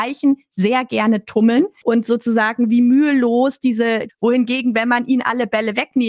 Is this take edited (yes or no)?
yes